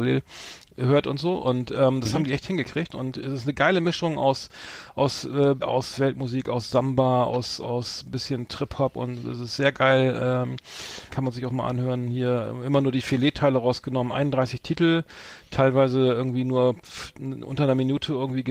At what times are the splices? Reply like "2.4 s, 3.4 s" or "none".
5.6 s, 11.1 s